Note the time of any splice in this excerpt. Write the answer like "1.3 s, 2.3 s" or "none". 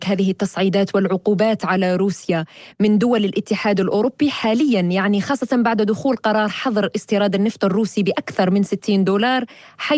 none